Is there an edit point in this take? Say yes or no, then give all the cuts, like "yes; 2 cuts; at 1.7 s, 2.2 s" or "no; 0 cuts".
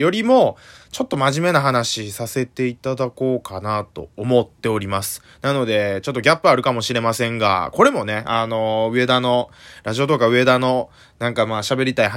no; 0 cuts